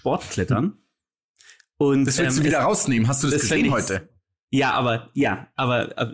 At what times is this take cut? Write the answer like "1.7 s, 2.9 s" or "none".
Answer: none

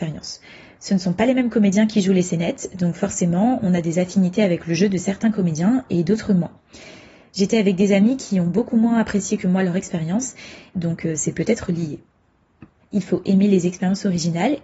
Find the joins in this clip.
10.7 s, 12.8 s

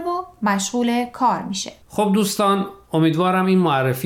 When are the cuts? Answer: 1.8 s

